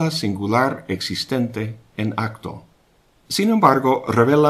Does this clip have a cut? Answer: yes; 1 cut; at 3.1 s

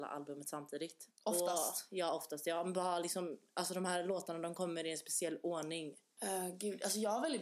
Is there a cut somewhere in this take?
yes; 2 cuts; at 1.1 s, 6.2 s

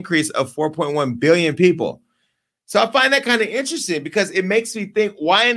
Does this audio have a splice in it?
no; 0 cuts

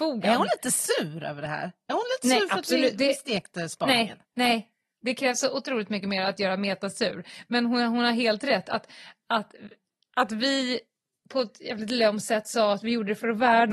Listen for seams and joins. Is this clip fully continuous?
no; 1 cut; at 4.2 s

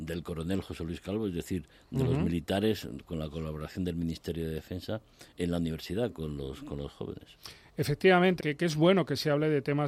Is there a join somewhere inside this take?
yes; 1 cut; at 8.4 s

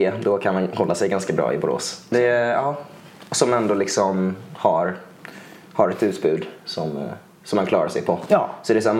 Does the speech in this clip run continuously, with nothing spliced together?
no; 1 cut; at 2.1 s

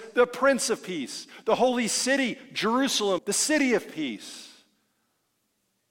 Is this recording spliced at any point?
yes; 1 cut; at 3.2 s

